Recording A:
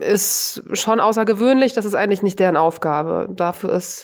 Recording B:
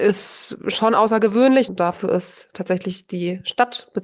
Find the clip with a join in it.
B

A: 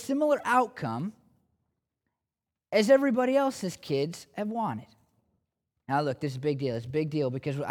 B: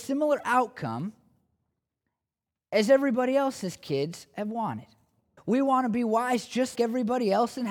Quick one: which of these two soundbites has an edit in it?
B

